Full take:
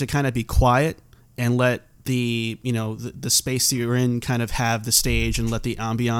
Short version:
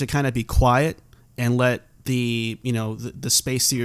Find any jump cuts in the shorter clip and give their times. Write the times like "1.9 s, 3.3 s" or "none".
none